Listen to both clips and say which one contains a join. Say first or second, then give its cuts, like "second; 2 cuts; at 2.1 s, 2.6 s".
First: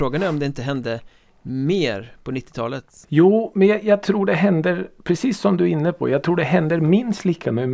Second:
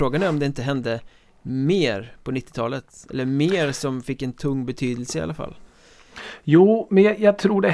first; 1 cut; at 3.0 s